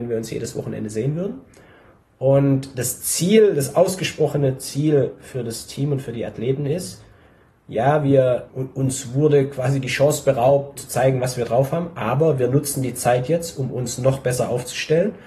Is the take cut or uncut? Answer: cut